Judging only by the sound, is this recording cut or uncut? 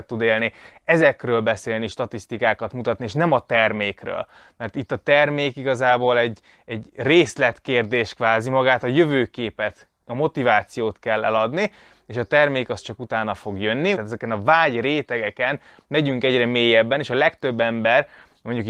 cut